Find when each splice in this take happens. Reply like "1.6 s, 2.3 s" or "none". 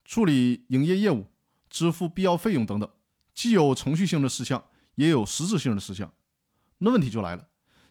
none